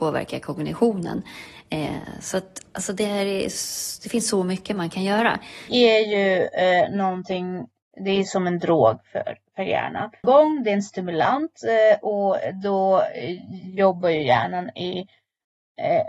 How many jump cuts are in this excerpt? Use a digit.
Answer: 2